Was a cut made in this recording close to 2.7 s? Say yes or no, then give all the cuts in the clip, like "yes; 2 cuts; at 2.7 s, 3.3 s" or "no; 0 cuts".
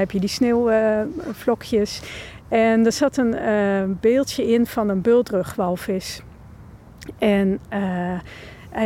no; 0 cuts